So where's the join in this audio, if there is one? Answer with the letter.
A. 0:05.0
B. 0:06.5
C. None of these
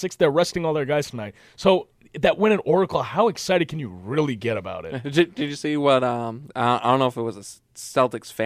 B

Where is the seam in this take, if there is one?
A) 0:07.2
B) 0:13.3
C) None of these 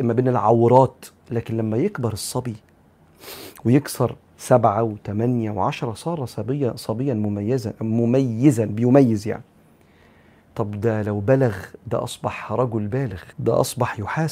B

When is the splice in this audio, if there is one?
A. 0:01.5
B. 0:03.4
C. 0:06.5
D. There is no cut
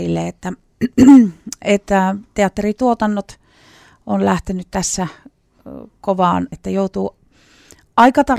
C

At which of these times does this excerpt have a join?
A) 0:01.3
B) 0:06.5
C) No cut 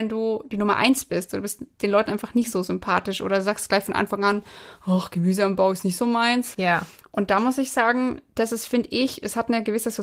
B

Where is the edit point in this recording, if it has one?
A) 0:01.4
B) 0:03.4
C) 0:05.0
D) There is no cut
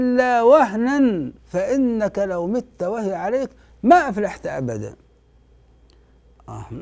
A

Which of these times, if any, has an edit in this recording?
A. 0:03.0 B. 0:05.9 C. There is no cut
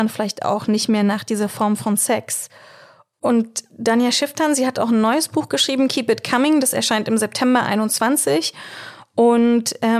C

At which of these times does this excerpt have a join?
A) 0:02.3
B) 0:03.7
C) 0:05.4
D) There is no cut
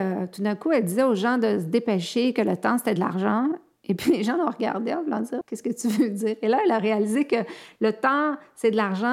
C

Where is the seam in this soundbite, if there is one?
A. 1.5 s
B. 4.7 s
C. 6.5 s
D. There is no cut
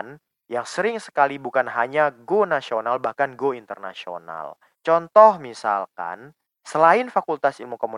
B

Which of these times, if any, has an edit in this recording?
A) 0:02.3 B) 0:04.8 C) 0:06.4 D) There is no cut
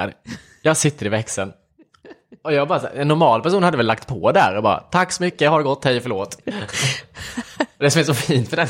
C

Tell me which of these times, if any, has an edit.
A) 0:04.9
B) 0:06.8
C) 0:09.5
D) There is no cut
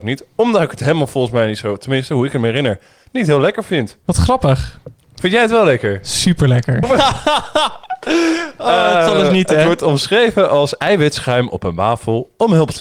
B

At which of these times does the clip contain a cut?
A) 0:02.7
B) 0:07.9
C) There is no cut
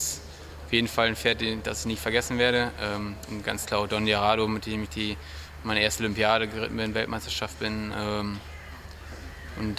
B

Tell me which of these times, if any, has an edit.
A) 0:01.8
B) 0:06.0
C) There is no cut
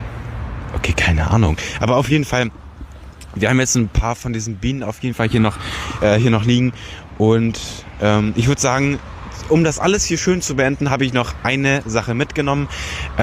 C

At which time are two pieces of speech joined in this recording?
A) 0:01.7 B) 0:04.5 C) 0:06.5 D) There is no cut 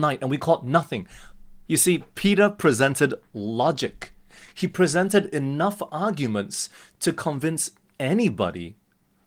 A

